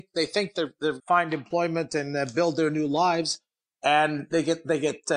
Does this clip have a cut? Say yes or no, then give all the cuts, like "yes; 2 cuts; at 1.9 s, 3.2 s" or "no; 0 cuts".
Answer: yes; 1 cut; at 1.0 s